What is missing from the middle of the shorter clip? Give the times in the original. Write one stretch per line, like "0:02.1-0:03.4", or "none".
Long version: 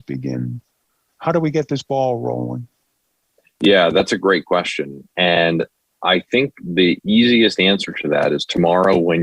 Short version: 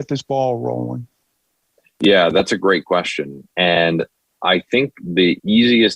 none